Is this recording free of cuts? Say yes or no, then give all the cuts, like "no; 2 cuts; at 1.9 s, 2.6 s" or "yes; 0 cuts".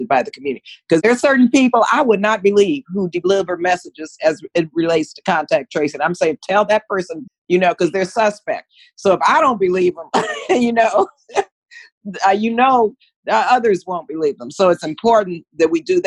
no; 1 cut; at 7.3 s